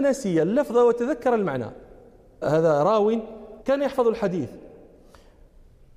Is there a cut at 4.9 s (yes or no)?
no